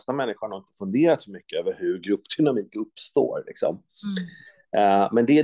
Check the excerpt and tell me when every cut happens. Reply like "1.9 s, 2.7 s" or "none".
none